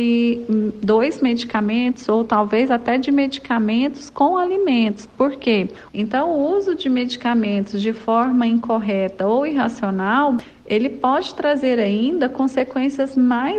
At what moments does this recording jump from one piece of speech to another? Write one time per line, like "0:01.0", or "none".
0:05.9